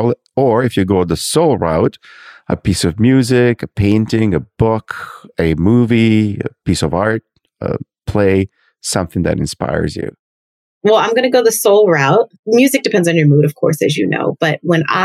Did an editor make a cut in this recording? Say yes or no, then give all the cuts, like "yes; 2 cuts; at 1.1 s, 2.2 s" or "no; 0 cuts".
no; 0 cuts